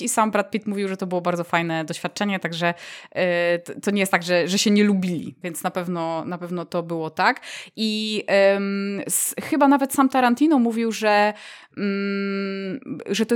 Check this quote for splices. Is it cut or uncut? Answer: cut